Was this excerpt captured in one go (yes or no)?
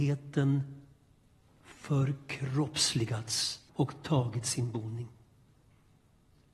no